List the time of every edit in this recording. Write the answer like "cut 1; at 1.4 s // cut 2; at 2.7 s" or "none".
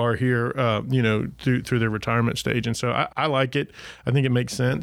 cut 1; at 3.1 s